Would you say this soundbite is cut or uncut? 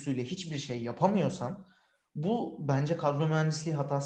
uncut